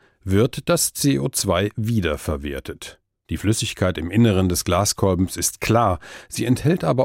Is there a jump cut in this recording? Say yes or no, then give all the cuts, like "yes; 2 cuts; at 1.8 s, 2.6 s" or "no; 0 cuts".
yes; 1 cut; at 3.2 s